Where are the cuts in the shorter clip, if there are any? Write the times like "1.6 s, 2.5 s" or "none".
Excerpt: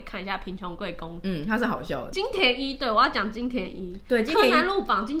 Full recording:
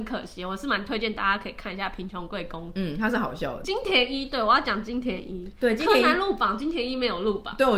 none